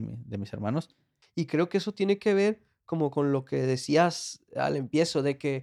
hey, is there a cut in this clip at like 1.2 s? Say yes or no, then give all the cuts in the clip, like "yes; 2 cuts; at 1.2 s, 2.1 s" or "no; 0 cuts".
yes; 1 cut; at 1.2 s